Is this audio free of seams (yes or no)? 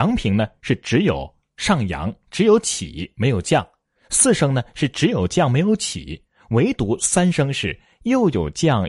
yes